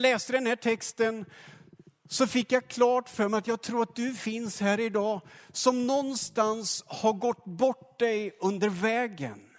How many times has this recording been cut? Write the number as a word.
zero